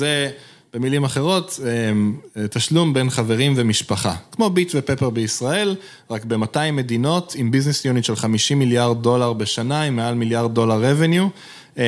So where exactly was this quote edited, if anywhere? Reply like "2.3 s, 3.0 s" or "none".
none